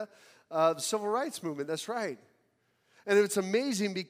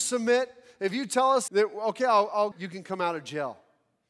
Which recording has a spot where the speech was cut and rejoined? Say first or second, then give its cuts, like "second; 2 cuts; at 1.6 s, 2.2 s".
second; 2 cuts; at 1.5 s, 2.5 s